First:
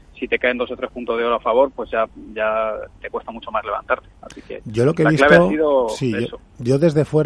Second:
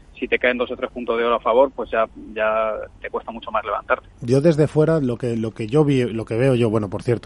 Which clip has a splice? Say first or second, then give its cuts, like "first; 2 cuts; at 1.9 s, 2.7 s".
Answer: second; 1 cut; at 4.1 s